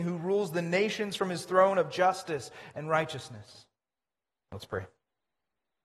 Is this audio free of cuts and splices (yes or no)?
no